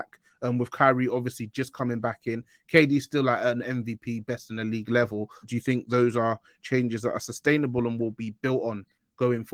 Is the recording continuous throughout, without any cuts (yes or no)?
no